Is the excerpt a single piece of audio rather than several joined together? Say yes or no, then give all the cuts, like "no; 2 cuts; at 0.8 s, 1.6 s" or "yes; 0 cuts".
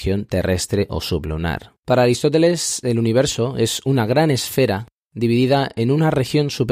no; 1 cut; at 1.8 s